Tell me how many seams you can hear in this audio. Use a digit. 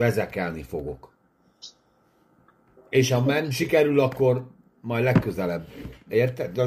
1